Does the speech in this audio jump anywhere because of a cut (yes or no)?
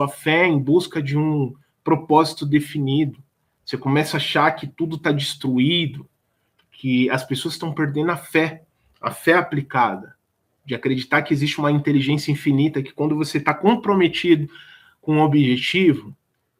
no